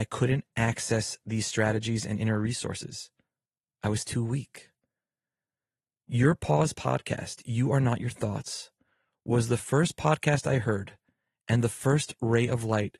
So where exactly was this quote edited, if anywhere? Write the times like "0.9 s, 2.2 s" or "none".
none